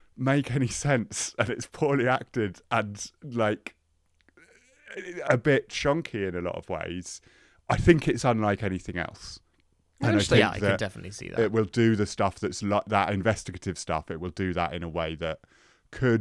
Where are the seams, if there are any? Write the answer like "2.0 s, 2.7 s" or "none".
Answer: none